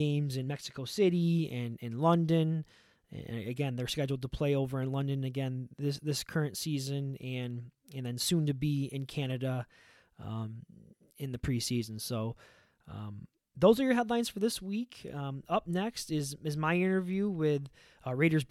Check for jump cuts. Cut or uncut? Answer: uncut